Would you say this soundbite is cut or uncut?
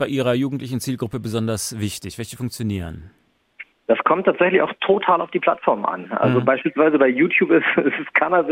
uncut